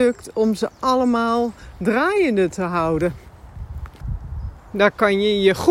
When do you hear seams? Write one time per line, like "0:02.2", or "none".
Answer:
0:04.6